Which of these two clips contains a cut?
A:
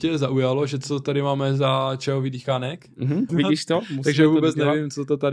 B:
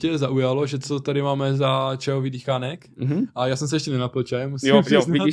A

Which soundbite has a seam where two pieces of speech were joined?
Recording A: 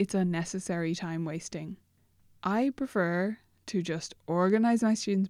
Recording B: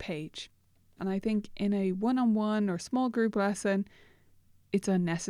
B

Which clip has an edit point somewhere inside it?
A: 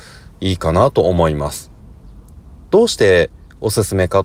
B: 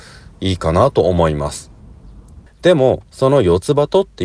B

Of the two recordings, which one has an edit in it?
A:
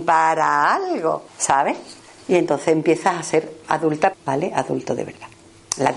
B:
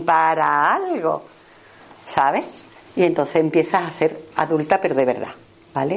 A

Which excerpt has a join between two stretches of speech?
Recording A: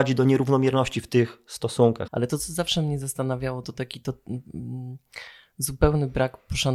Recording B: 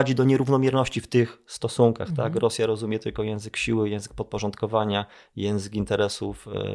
A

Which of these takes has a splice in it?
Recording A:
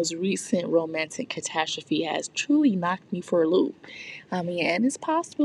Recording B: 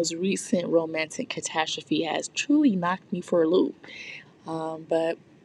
B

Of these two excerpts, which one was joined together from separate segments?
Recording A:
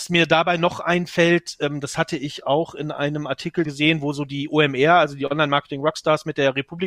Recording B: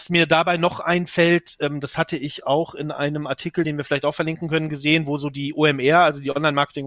A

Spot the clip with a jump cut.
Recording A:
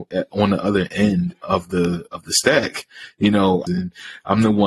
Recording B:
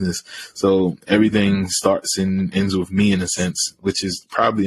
A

